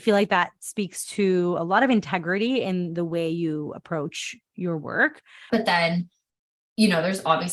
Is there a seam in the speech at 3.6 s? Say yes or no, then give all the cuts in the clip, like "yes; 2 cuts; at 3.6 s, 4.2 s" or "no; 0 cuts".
no; 1 cut; at 5.5 s